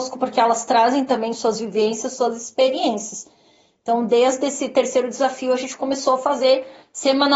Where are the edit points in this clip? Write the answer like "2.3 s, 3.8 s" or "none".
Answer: none